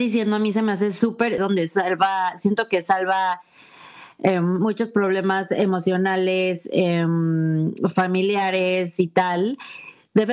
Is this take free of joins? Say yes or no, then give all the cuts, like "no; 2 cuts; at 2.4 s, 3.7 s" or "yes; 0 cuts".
no; 1 cut; at 1.4 s